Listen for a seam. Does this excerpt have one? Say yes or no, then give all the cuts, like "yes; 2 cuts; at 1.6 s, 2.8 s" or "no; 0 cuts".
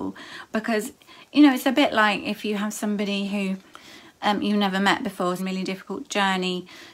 yes; 1 cut; at 5.4 s